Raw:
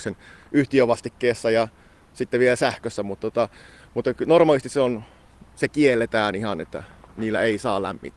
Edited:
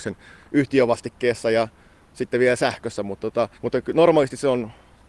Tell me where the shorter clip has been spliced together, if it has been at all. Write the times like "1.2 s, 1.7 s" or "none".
3.6 s